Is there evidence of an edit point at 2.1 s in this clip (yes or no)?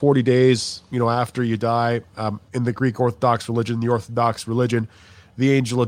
no